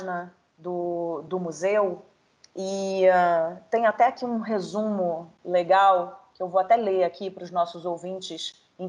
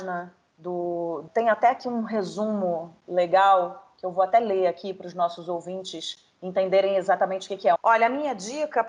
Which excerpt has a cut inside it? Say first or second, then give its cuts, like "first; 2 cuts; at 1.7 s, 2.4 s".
second; 2 cuts; at 1.3 s, 7.8 s